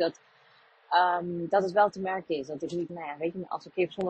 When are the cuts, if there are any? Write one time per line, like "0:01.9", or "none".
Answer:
0:02.9

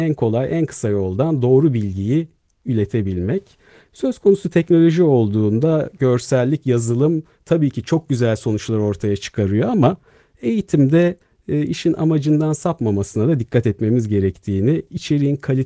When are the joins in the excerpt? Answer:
none

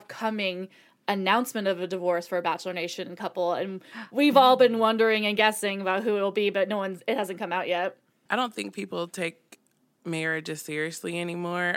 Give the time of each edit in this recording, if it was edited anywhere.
0:08.3

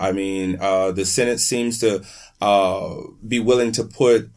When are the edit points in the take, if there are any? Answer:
0:03.2

